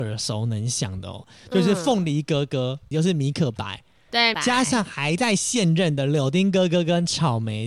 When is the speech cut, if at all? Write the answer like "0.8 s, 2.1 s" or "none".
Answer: 2.9 s, 4.3 s